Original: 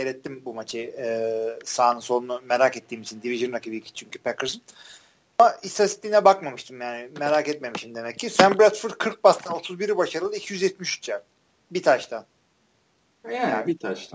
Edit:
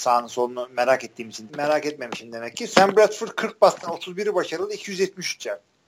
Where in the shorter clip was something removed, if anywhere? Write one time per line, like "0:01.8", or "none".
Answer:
0:01.5